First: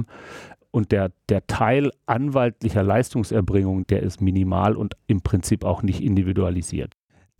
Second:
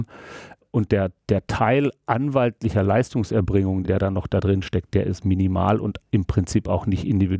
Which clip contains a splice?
first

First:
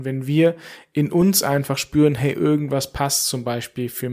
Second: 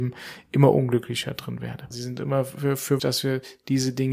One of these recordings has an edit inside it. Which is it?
second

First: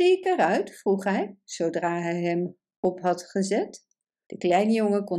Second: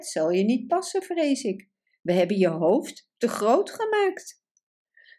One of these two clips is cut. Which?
first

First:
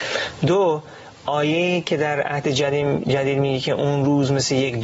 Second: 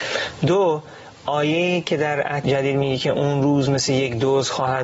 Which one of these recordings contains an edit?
second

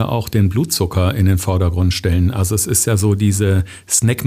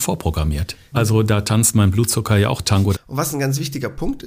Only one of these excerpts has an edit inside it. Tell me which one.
second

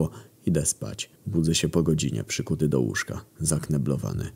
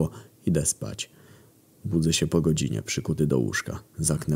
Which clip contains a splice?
first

